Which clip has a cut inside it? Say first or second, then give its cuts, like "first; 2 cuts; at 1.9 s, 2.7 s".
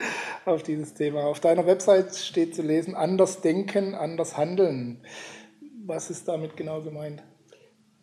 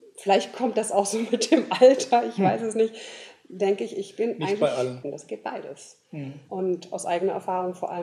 second; 2 cuts; at 5.0 s, 6.5 s